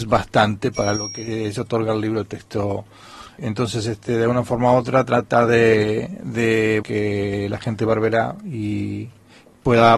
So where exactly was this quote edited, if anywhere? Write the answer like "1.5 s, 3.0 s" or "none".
3.4 s, 6.8 s